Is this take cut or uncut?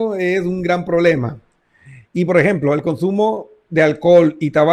uncut